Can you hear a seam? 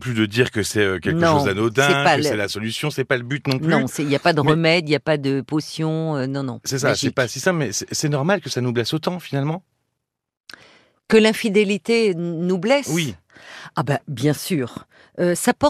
no; 0 cuts

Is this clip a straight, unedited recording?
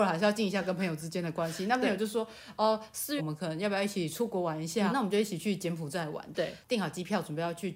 no; 2 cuts; at 3.2 s, 4.9 s

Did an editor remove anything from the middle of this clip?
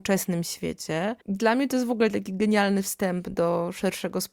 yes; 1 cut; at 1.2 s

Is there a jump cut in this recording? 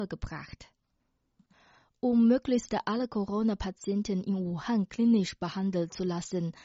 no; 0 cuts

